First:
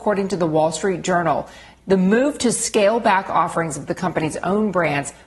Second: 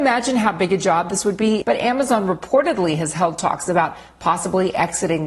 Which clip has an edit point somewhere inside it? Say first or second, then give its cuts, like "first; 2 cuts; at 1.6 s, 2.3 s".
second; 1 cut; at 1.6 s